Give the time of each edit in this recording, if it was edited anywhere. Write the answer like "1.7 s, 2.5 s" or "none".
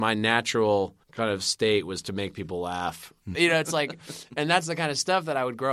1.0 s, 3.3 s